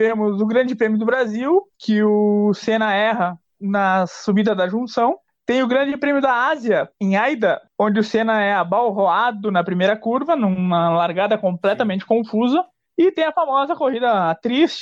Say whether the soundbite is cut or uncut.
cut